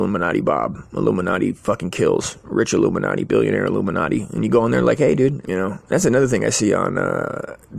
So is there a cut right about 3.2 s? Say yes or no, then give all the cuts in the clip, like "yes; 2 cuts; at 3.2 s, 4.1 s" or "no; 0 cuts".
no; 1 cut; at 5.4 s